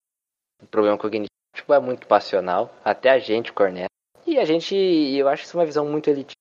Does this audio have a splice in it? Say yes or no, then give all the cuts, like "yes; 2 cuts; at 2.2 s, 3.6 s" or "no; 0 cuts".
yes; 2 cuts; at 1.5 s, 4.1 s